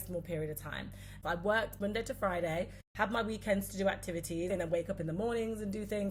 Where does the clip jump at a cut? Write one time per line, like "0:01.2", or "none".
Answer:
0:01.2
0:04.5

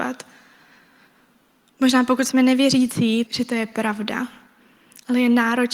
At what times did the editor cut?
0:03.3

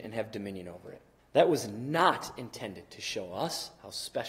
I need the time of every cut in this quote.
0:01.2

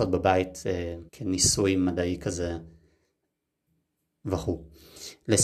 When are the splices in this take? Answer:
0:01.1

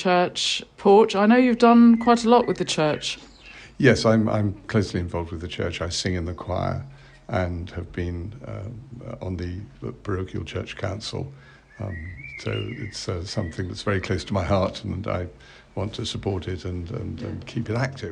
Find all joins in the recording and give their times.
none

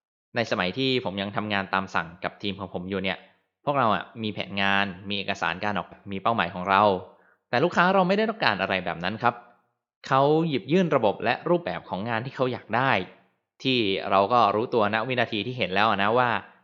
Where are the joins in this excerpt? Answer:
0:05.9

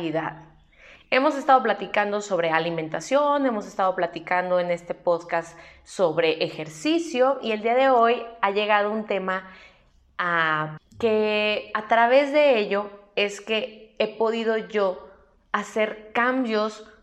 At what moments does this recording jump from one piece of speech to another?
0:10.8

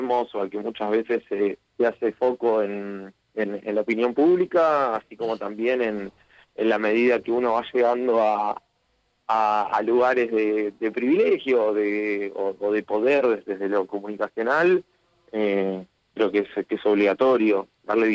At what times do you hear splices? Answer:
0:01.7

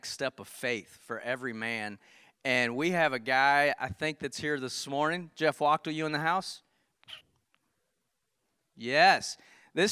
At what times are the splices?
none

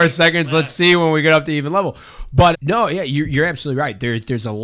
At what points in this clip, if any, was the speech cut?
0:02.5

